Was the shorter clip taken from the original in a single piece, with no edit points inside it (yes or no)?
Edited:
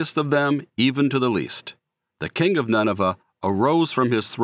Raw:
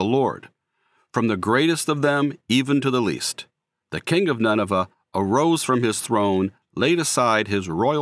yes